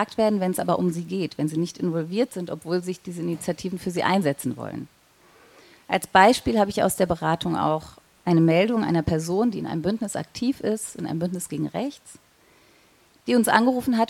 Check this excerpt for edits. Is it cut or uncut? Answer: uncut